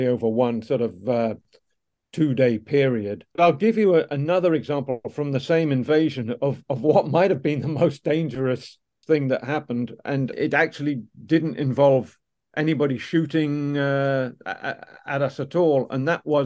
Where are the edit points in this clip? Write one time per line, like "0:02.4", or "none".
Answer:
none